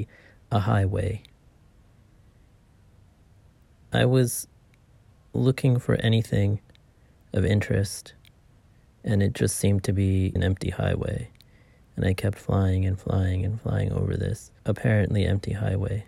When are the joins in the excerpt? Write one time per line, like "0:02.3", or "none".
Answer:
0:10.4
0:14.6